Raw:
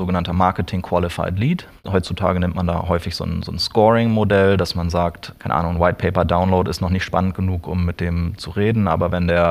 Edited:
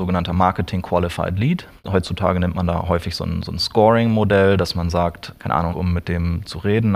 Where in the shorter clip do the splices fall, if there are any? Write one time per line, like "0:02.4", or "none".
0:05.7